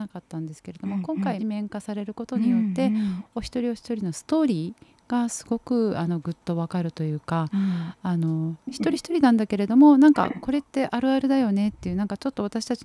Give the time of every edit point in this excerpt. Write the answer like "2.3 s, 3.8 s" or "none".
1.4 s